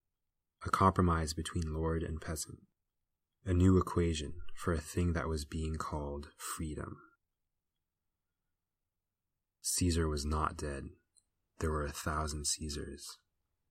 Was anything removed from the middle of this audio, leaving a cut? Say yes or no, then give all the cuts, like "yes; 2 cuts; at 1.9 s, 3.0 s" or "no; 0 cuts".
no; 0 cuts